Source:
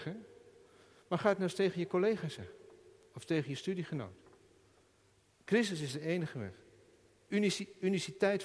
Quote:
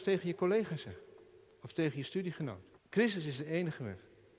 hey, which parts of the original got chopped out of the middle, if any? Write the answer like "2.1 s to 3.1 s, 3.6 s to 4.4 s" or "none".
4.3 s to 5.3 s